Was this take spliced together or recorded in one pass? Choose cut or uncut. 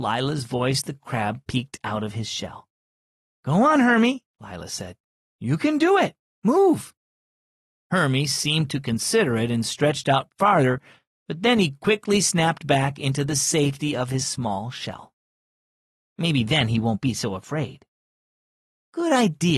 cut